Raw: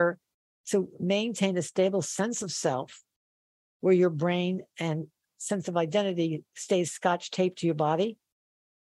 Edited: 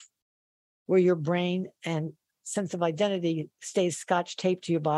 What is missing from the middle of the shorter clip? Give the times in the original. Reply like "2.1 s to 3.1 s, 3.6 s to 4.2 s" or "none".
none